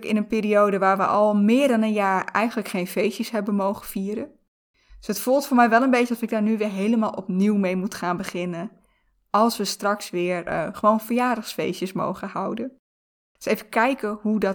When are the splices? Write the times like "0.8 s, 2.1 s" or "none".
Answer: none